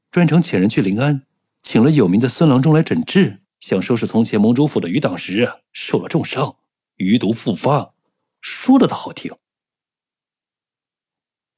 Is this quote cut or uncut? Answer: cut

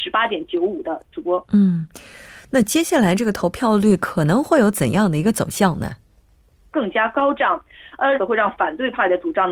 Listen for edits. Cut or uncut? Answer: cut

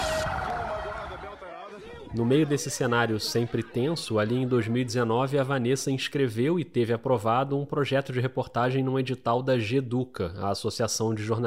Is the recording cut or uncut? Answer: uncut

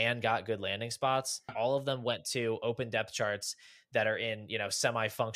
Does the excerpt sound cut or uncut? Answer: cut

